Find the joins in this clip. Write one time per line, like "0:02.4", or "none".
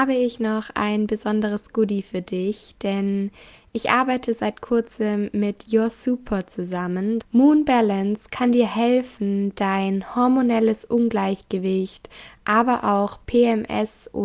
0:07.2